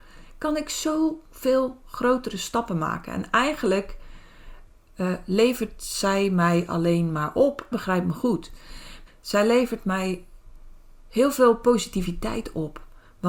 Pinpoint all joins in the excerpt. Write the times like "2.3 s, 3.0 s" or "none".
7.7 s, 9.1 s